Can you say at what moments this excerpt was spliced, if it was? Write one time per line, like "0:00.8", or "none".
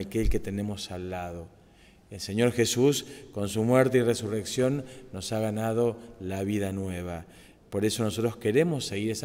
none